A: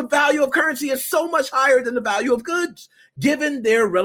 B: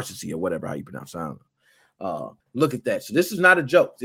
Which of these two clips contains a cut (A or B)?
B